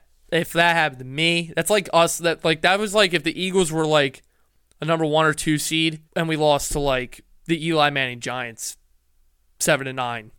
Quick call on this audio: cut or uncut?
cut